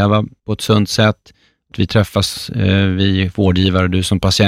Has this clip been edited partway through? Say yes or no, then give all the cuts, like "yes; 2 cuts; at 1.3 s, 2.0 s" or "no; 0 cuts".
no; 0 cuts